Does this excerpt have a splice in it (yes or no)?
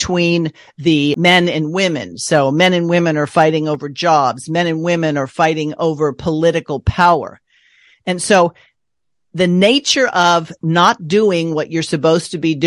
no